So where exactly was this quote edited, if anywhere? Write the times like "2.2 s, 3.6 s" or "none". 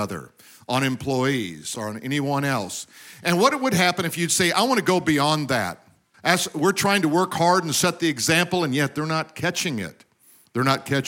1.7 s, 6.1 s